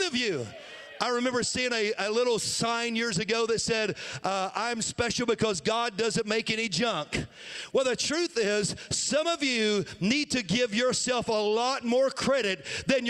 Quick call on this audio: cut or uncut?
uncut